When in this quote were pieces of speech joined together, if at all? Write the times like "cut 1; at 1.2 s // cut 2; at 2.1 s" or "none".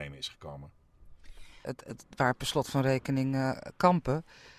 cut 1; at 1.6 s

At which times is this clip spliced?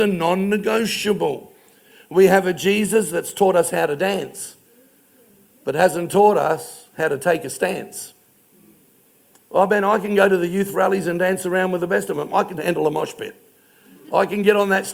cut 1; at 12.6 s

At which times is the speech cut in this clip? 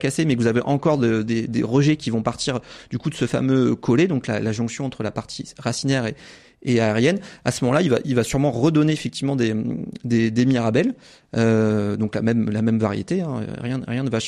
none

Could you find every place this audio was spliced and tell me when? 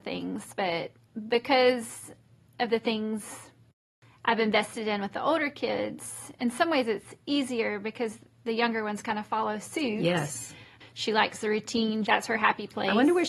cut 1; at 10.8 s // cut 2; at 12.1 s

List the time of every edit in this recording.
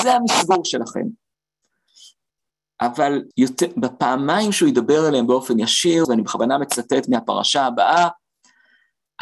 cut 1; at 3.3 s // cut 2; at 6.0 s

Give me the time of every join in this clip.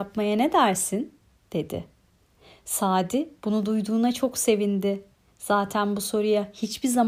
none

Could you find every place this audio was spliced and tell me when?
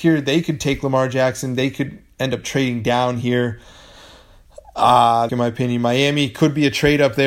cut 1; at 5.3 s

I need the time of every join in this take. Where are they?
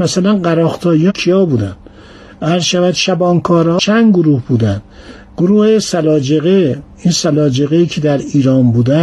none

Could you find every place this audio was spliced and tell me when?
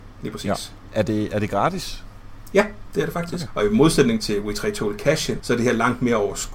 cut 1; at 3.5 s // cut 2; at 5.4 s

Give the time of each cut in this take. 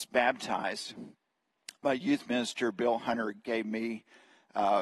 none

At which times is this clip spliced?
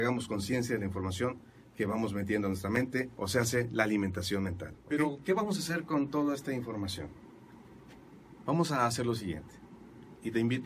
none

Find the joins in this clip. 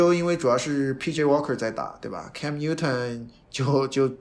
none

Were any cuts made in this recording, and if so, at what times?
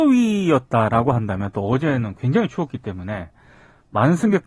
none

